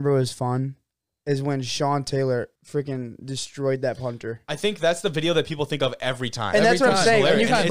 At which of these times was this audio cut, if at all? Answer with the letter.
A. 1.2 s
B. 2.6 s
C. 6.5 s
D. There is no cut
B